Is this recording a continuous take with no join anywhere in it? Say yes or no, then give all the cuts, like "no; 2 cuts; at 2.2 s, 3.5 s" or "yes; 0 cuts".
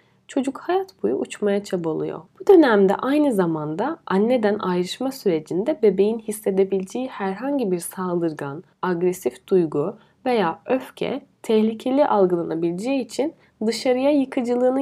no; 1 cut; at 2.3 s